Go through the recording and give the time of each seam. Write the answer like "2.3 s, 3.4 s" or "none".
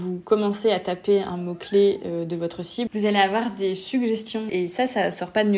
2.9 s, 4.5 s